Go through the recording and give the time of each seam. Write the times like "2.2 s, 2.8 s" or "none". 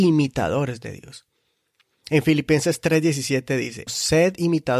3.9 s